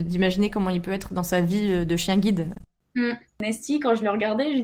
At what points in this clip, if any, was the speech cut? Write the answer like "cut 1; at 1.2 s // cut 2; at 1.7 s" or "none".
none